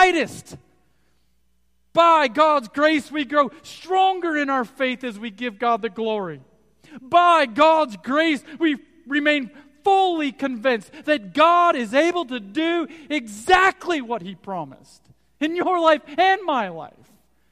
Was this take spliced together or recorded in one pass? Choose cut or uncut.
uncut